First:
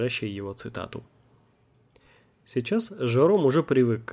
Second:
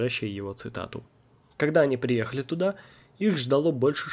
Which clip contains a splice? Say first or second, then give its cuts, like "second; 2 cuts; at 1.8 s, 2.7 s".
second; 1 cut; at 1.4 s